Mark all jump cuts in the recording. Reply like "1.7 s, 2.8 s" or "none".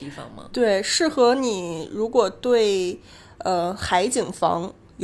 none

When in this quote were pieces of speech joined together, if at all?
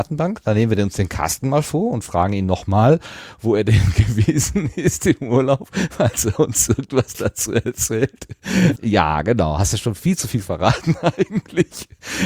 8.8 s

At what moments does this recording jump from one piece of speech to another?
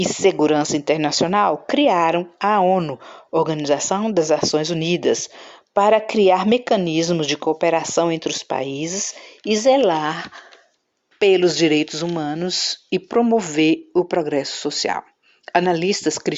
none

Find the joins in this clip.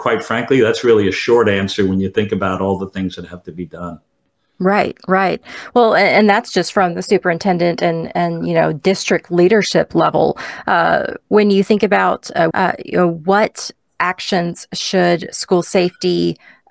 12.5 s

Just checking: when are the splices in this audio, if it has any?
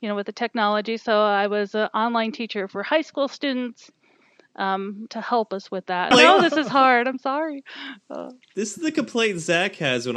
5.1 s, 6.1 s

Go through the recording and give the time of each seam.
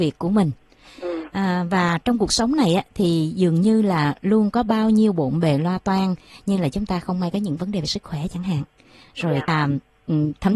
9.5 s

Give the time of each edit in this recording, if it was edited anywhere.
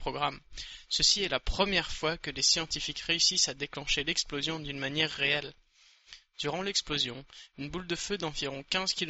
none

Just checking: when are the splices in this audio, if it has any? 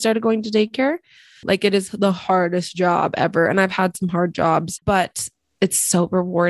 1.4 s, 4.8 s

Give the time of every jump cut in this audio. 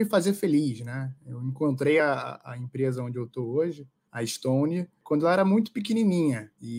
none

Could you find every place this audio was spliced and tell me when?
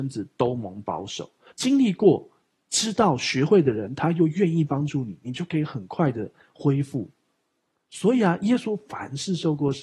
1.5 s

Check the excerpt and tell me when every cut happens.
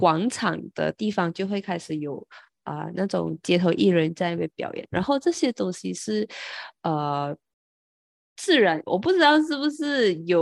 8.9 s

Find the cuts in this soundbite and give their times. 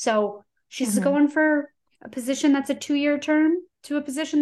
1.9 s

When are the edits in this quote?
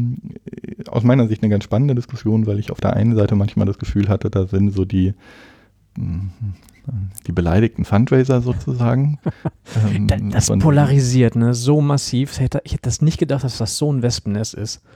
none

